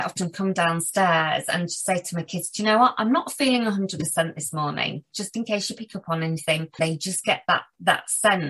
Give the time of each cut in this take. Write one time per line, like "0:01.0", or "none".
0:06.8